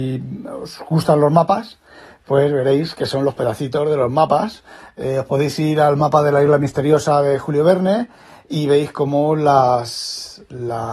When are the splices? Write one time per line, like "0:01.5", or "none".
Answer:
none